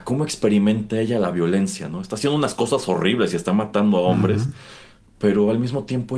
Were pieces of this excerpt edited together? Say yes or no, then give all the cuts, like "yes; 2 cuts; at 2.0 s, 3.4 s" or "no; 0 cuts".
no; 0 cuts